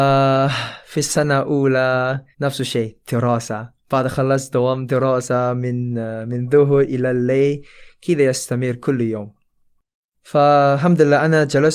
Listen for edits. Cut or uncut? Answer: cut